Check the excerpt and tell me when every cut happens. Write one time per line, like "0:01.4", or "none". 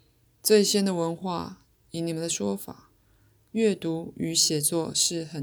0:01.7